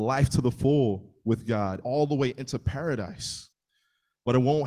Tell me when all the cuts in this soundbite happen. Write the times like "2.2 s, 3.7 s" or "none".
1.8 s